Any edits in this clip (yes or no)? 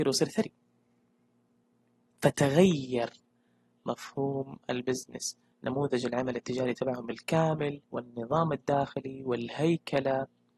yes